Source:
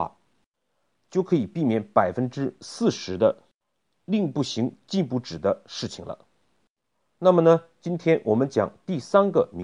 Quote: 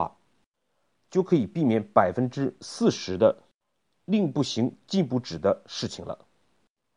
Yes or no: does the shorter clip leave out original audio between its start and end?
no